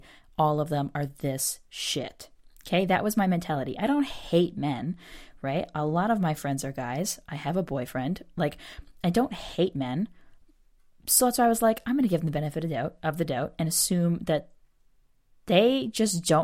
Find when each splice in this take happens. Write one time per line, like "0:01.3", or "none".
none